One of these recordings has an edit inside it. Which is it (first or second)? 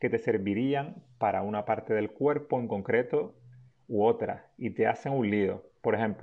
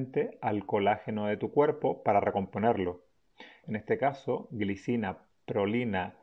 second